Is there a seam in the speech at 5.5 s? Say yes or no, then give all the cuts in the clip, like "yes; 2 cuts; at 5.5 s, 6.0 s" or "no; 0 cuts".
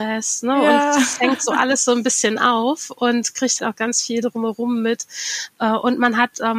no; 1 cut; at 3.6 s